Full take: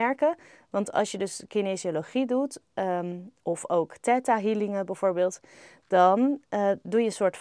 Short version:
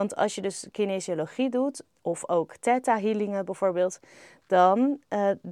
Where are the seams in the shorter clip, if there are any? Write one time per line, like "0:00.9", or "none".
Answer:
0:01.9